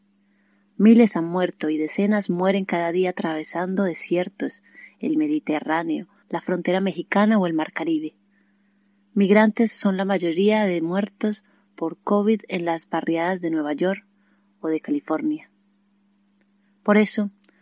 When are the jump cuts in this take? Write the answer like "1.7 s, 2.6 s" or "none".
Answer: 6.2 s